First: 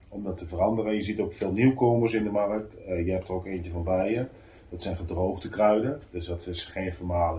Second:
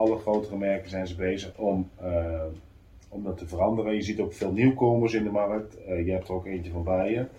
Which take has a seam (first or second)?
second